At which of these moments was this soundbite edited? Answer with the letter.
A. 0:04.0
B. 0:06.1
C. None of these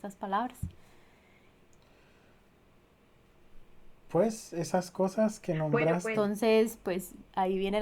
B